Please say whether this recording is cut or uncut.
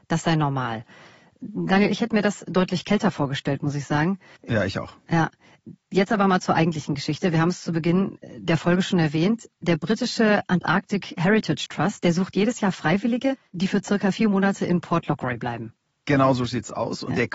uncut